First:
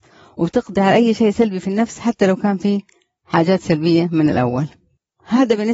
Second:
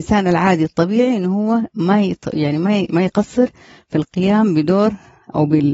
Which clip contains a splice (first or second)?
second